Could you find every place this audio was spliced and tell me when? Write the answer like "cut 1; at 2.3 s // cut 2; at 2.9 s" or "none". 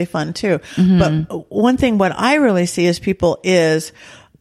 none

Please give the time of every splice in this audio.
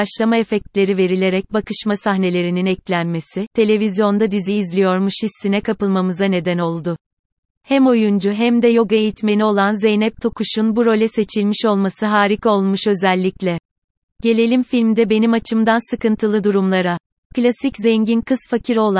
cut 1; at 7.5 s // cut 2; at 14.1 s

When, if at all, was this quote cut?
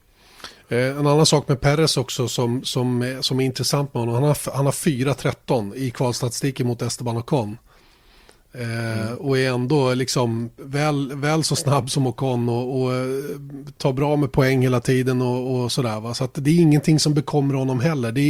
none

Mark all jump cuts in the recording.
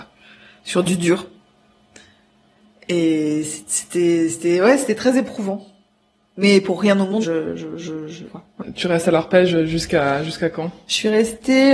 cut 1; at 7.2 s // cut 2; at 8.3 s

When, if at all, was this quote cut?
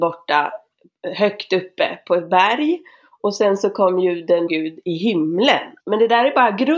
cut 1; at 4.5 s // cut 2; at 5.8 s

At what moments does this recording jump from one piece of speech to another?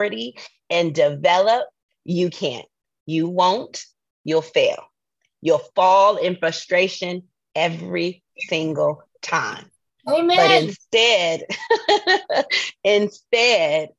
none

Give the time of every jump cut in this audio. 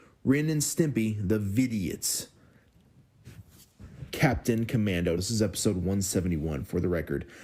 cut 1; at 5.2 s

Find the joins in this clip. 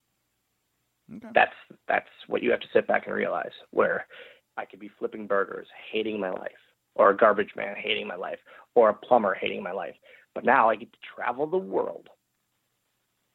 cut 1; at 4.4 s

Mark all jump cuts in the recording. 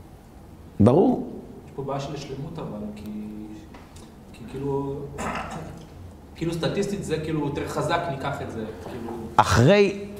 none

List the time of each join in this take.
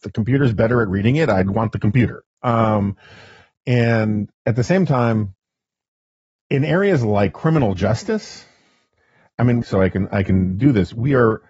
cut 1; at 4.3 s // cut 2; at 9.6 s

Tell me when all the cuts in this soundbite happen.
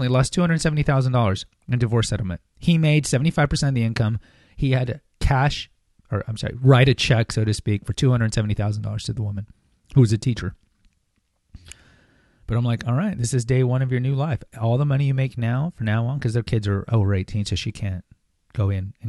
none

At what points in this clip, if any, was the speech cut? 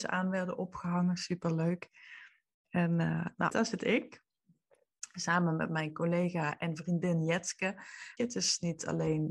cut 1; at 3.5 s // cut 2; at 8.2 s

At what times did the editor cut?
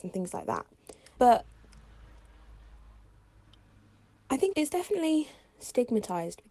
cut 1; at 1.2 s // cut 2; at 4.5 s

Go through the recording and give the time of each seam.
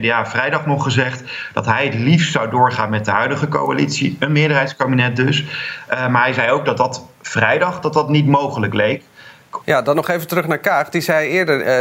cut 1; at 9.6 s

